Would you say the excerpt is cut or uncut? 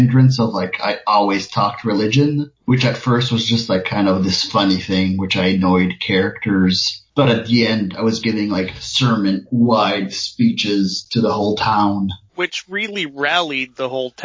uncut